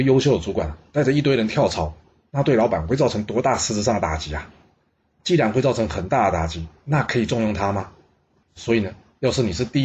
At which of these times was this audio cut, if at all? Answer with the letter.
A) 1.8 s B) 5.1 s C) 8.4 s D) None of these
C